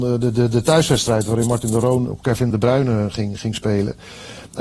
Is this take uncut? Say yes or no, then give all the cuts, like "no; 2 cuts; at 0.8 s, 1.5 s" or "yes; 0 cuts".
no; 1 cut; at 2.5 s